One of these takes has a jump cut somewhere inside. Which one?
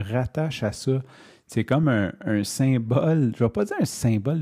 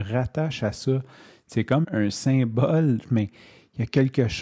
second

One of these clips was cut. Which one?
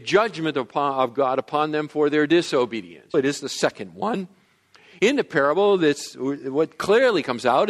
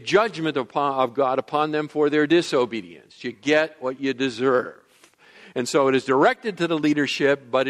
first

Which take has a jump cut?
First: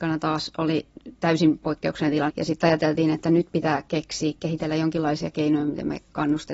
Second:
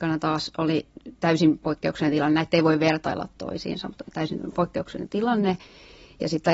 first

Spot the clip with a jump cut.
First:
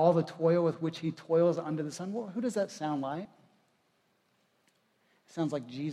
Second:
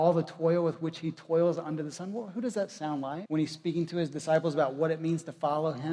second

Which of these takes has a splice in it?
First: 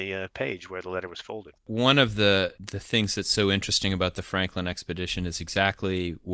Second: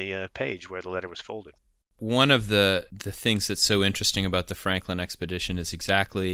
first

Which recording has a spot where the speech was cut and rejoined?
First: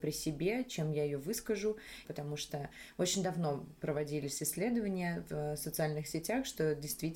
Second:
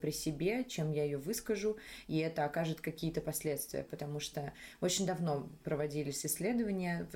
first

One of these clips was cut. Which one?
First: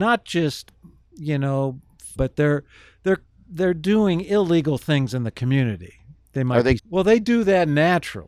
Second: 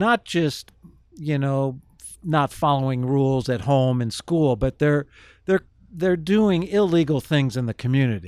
first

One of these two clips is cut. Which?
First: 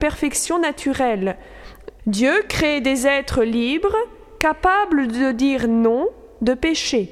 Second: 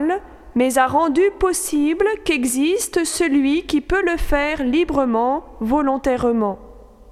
first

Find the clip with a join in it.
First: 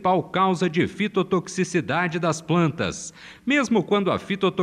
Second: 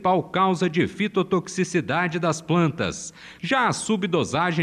second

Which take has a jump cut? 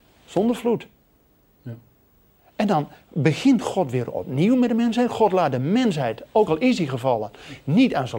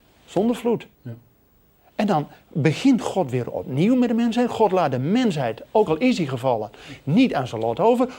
second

